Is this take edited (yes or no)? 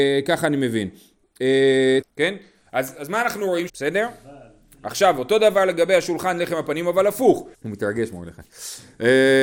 yes